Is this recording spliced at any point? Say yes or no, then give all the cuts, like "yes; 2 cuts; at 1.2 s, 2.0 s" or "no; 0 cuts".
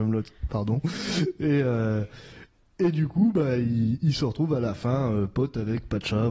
no; 0 cuts